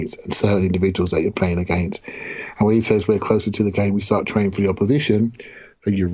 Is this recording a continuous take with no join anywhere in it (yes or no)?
yes